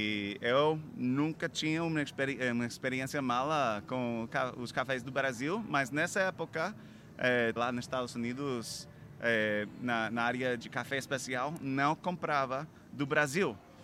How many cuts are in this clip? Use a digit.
2